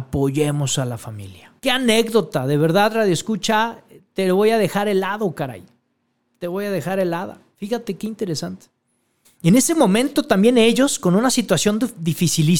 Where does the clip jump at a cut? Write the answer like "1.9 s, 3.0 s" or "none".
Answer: 1.6 s, 9.2 s